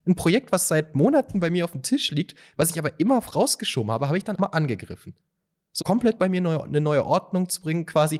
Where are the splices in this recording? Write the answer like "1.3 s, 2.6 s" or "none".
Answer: 4.4 s, 5.8 s